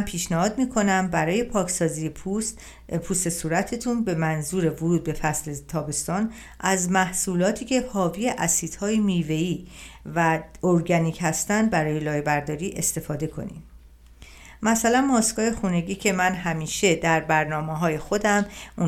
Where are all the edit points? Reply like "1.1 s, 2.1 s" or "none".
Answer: none